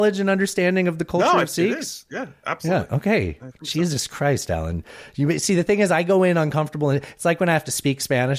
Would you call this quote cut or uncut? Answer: uncut